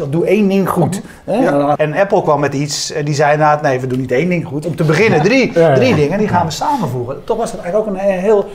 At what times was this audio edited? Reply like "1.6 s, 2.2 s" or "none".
1.7 s, 4.6 s